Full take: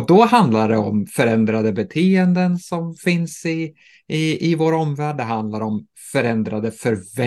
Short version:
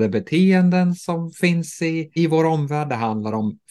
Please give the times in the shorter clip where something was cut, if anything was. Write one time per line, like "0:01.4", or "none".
0:02.2